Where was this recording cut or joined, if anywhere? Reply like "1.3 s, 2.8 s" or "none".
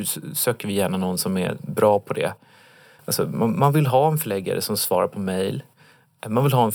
3.0 s